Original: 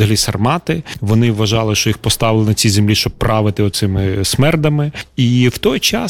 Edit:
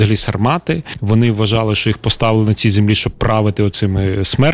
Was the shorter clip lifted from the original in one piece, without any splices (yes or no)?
yes